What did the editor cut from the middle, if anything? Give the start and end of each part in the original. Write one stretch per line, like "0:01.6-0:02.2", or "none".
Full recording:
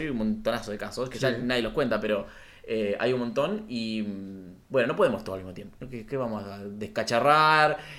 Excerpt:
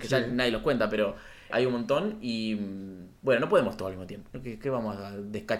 0:02.6-0:03.0